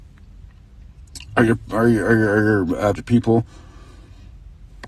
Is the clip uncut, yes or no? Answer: no